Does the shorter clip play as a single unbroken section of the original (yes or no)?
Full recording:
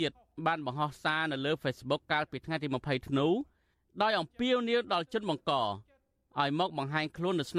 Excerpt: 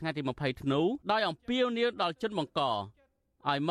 no